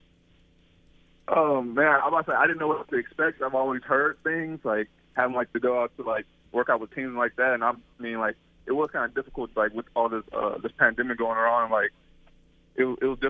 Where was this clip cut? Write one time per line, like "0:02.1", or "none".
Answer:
none